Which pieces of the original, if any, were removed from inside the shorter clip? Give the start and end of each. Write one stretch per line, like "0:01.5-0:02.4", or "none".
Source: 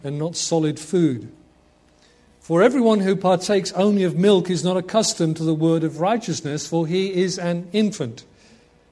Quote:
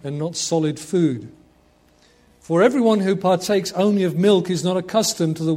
none